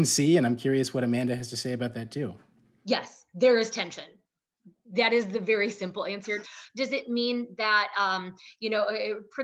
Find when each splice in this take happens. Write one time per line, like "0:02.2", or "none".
none